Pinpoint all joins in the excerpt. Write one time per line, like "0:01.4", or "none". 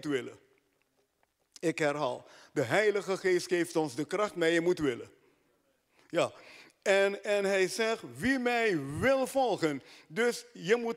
none

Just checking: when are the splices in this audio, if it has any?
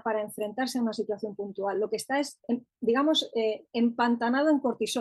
none

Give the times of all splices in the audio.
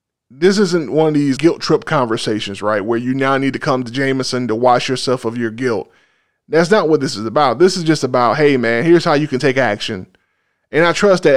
0:01.4

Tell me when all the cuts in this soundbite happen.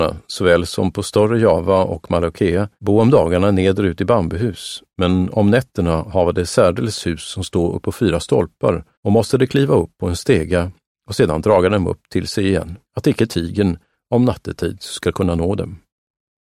0:02.8
0:08.9
0:12.8

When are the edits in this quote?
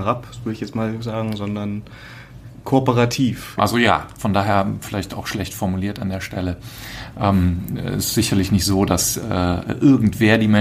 0:03.6

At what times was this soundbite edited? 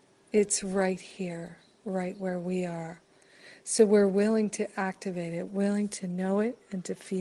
0:05.5

